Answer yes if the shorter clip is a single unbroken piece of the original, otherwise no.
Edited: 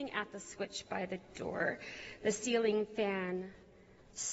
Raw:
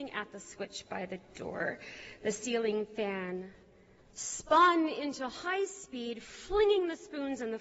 yes